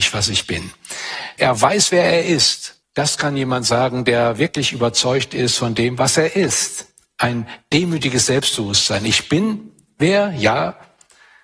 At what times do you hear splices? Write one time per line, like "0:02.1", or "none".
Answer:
0:01.4
0:02.8